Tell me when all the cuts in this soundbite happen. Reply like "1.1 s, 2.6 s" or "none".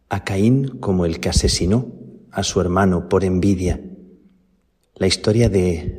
4.8 s